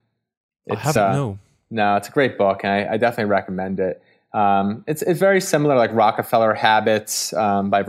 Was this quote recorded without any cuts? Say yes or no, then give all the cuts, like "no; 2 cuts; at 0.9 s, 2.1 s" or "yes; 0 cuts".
yes; 0 cuts